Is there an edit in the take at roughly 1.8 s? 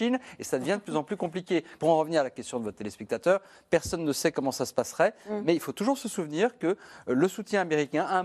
yes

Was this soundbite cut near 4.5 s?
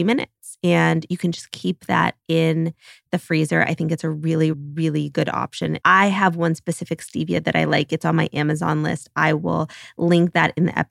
yes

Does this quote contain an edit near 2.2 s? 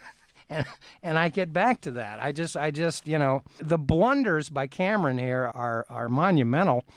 no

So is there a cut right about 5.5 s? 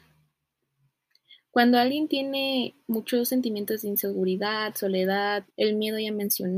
yes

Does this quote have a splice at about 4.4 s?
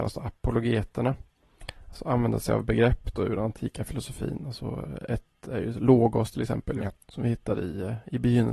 no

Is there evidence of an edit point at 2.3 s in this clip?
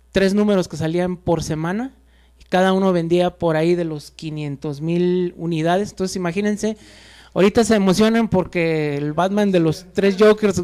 no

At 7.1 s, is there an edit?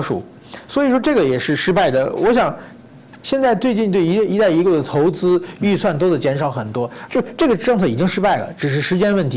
yes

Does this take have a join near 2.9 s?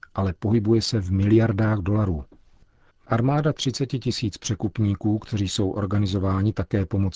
yes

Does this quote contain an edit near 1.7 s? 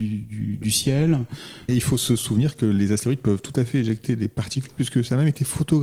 yes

